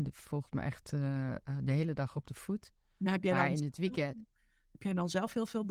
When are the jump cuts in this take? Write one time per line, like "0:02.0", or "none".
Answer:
none